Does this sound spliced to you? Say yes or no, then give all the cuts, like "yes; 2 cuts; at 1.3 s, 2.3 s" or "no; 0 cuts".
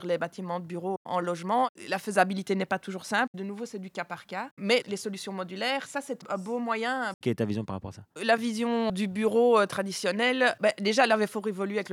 yes; 2 cuts; at 7.1 s, 8.9 s